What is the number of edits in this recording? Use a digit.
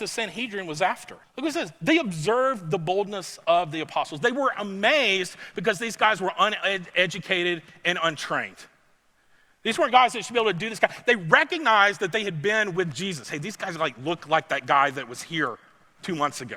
1